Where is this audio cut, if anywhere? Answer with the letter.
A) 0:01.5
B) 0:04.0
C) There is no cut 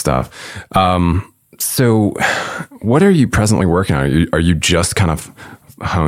C